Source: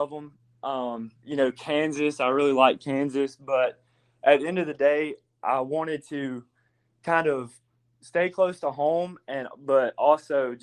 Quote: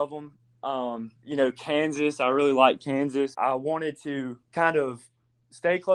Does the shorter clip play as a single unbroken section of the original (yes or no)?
no